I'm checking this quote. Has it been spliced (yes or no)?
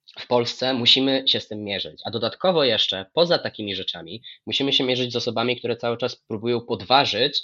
no